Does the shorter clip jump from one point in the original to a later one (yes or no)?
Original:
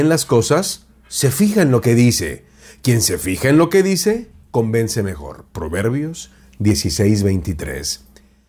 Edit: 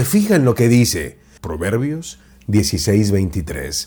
yes